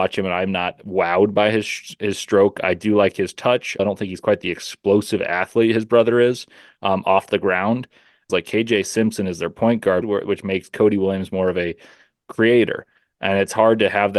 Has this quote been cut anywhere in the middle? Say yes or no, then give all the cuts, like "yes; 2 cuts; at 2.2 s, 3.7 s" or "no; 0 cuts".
yes; 3 cuts; at 3.8 s, 8.3 s, 10.0 s